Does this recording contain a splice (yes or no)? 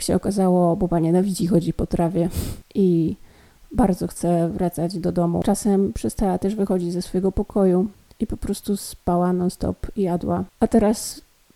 no